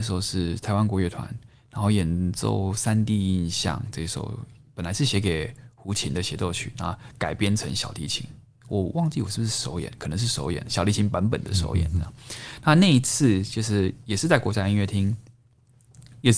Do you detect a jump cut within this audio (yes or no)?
no